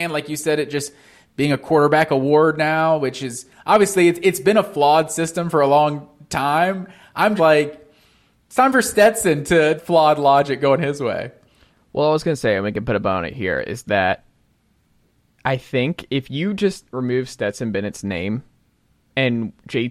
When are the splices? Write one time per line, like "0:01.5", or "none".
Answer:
0:07.4
0:09.8